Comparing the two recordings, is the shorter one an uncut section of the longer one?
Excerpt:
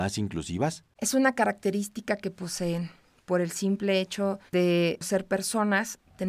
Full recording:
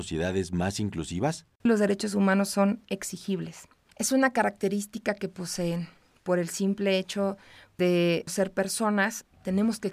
no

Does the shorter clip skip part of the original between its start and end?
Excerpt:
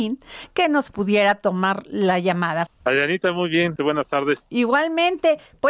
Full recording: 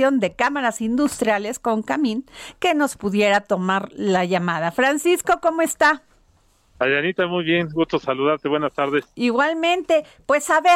yes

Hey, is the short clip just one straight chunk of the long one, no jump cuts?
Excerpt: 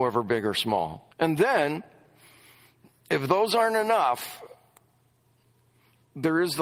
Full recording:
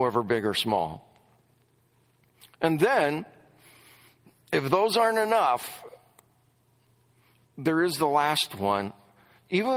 no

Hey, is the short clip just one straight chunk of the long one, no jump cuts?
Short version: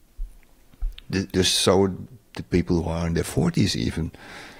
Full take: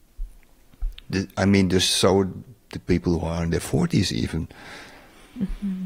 no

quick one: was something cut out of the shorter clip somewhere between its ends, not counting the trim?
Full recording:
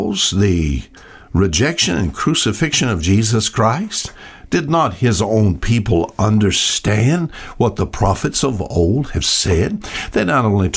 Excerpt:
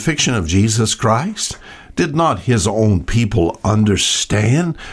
no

